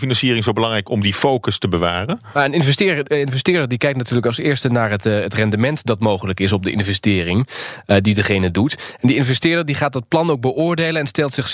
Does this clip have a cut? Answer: no; 0 cuts

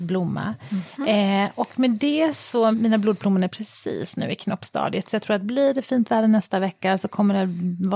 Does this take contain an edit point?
yes; 1 cut; at 2.7 s

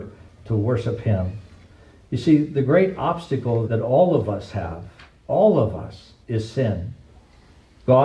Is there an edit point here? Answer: yes; 2 cuts; at 3.6 s, 6.2 s

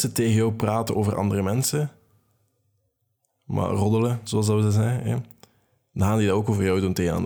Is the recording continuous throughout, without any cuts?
yes; 0 cuts

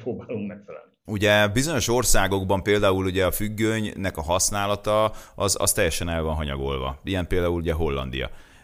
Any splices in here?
no; 0 cuts

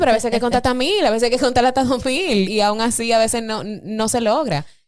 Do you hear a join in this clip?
yes; 1 cut; at 2.5 s

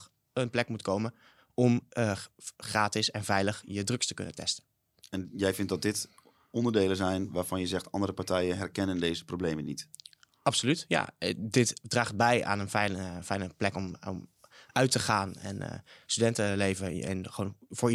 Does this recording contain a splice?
no; 0 cuts

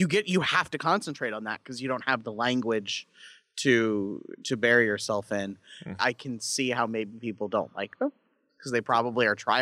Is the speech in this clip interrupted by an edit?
yes; 1 cut; at 6.0 s

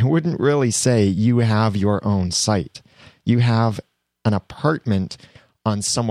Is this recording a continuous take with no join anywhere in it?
yes; 0 cuts

